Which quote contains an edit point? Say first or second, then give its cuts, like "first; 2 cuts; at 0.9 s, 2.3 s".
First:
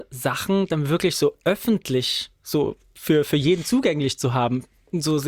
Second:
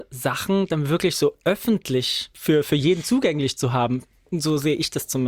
second; 1 cut; at 2.3 s